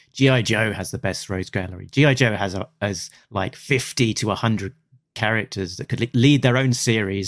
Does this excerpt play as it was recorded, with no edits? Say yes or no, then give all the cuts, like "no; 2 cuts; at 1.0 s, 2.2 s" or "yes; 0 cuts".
yes; 0 cuts